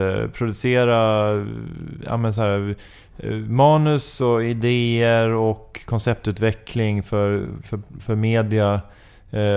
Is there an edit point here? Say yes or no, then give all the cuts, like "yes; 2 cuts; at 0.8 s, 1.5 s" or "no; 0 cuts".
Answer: no; 0 cuts